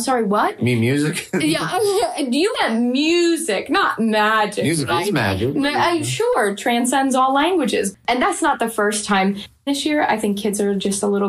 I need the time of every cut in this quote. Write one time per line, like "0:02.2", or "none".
none